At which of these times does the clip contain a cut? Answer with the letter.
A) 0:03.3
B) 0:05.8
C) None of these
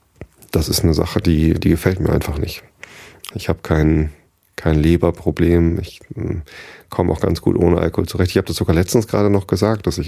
A